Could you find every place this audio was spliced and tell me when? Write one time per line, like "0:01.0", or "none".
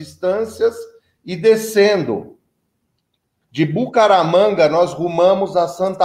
0:03.4